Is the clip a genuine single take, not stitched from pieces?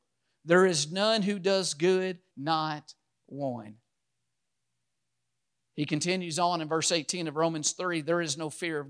no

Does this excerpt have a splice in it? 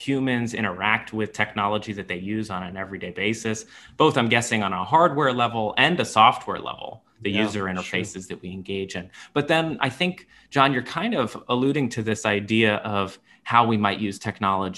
no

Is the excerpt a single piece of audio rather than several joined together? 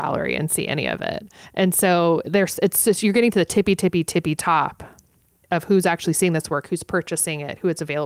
yes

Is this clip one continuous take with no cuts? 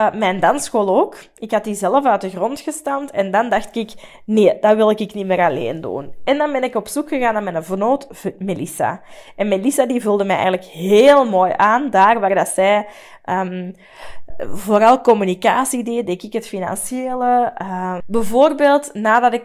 no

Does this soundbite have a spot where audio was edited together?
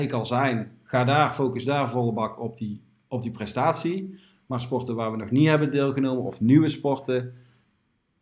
no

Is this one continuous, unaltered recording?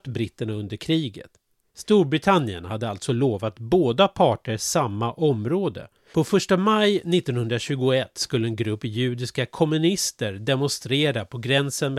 no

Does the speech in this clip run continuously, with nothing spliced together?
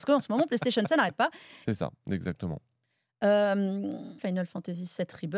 no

